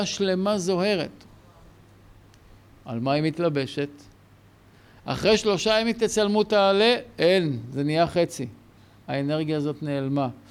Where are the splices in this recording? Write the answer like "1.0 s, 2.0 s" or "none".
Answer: none